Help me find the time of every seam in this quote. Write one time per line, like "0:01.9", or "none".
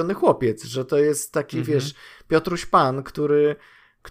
none